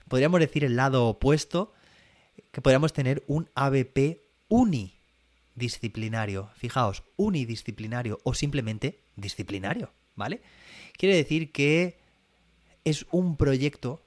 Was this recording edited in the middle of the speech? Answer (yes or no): no